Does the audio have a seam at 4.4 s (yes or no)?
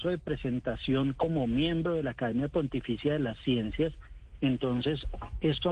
yes